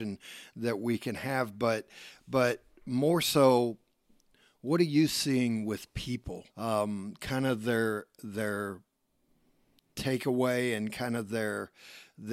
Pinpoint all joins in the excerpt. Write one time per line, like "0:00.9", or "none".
0:06.5